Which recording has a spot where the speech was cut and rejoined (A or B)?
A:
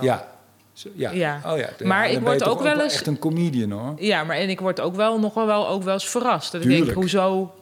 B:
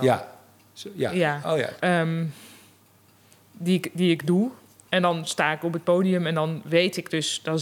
B